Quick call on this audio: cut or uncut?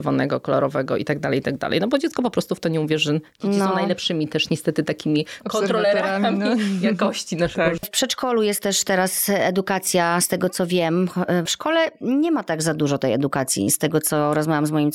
cut